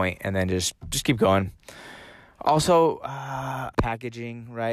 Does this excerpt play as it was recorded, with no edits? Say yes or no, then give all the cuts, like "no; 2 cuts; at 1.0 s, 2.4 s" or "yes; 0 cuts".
no; 1 cut; at 3.7 s